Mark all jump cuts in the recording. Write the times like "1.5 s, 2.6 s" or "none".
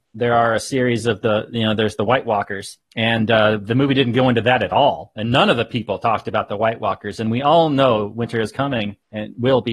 none